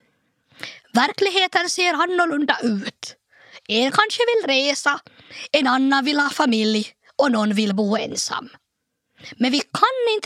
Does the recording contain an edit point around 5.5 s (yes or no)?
yes